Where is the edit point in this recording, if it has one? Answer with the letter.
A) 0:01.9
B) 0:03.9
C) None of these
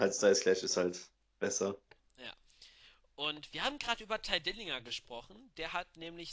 C